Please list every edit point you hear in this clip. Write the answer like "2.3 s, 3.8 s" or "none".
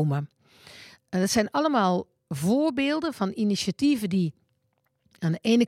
none

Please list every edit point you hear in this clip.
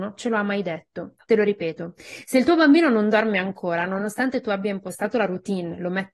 1.2 s

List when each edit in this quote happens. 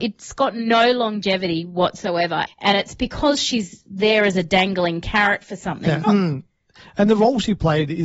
2.5 s, 6.0 s

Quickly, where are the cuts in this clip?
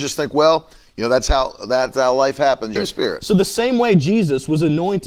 2.8 s

